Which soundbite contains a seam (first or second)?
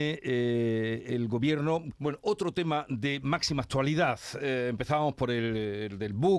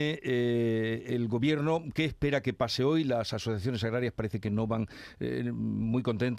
first